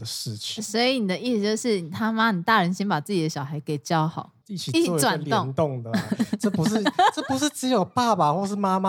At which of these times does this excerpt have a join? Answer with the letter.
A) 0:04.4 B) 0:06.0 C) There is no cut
A